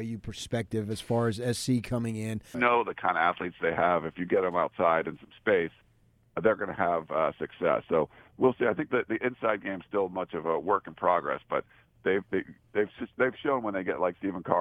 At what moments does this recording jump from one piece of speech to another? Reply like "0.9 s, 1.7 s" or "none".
2.5 s